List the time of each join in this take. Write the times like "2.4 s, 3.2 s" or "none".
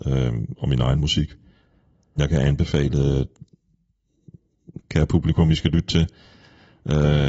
2.2 s, 4.8 s